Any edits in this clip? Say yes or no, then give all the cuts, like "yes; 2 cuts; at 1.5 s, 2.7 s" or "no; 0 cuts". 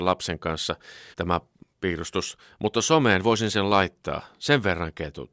yes; 1 cut; at 1.1 s